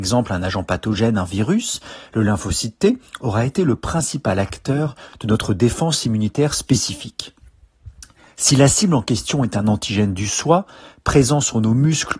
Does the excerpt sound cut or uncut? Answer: uncut